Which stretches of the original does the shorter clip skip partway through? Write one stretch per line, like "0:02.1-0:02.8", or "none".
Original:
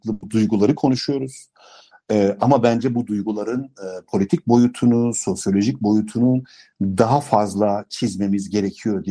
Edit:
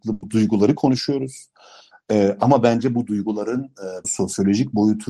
0:04.0-0:05.1